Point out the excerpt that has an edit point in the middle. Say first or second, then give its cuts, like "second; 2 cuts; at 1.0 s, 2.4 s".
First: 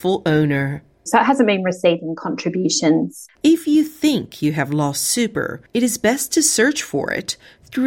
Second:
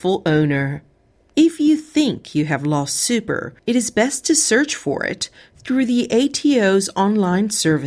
first; 2 cuts; at 1.1 s, 3.3 s